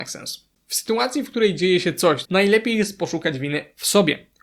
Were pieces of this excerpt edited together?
yes; 1 cut; at 2.2 s

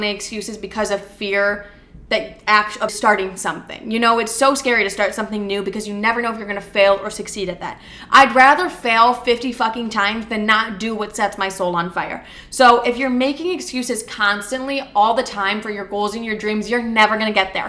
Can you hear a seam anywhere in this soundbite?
yes; 1 cut; at 2.9 s

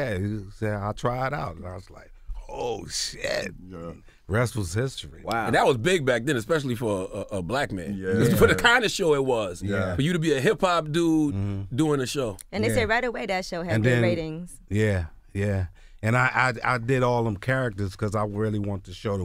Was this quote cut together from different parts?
no; 0 cuts

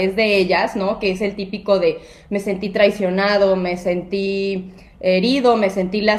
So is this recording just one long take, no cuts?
yes; 0 cuts

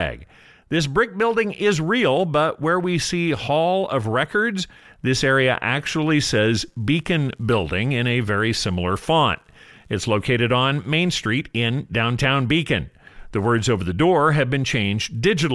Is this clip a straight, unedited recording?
yes; 0 cuts

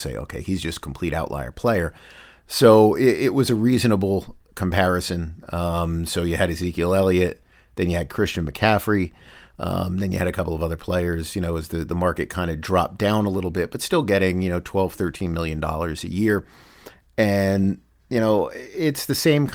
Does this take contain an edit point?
no; 0 cuts

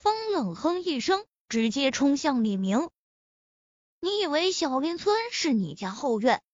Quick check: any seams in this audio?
yes; 1 cut; at 3.9 s

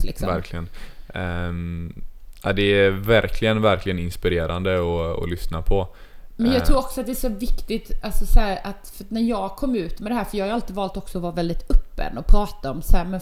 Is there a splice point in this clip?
no; 0 cuts

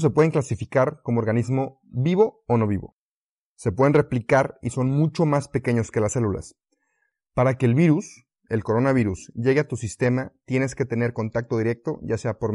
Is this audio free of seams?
yes; 0 cuts

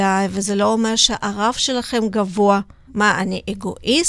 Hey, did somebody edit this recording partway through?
yes; 1 cut; at 2.9 s

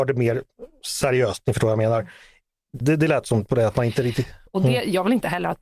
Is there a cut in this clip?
yes; 2 cuts; at 2.8 s, 4.5 s

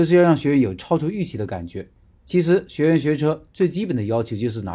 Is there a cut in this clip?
no; 0 cuts

